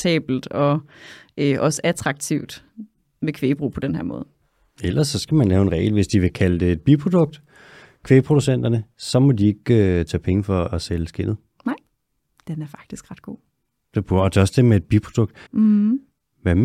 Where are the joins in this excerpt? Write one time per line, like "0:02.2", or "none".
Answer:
0:15.5